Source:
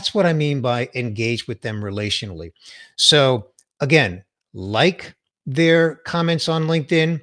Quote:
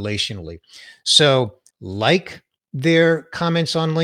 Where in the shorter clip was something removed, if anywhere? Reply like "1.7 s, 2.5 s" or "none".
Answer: 1.7 s